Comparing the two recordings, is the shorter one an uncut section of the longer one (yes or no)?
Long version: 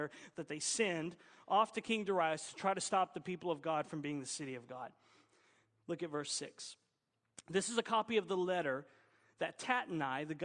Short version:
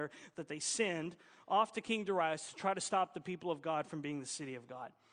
yes